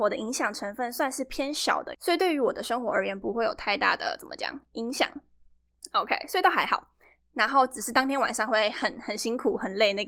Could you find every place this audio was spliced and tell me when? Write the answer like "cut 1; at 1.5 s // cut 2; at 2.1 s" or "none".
cut 1; at 1.9 s